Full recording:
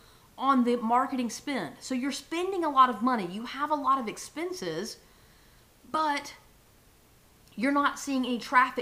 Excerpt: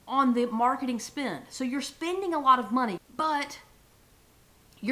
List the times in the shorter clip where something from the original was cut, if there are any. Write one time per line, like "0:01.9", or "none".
0:03.0